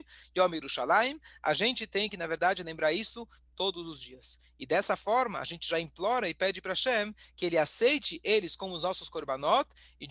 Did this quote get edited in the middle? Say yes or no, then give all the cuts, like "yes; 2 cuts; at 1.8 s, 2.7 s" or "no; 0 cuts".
no; 0 cuts